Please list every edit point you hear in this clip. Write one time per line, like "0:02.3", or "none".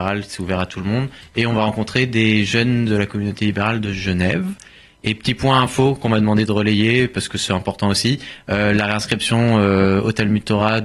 none